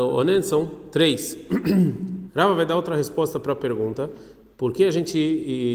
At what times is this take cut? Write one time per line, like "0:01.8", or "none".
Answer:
0:02.3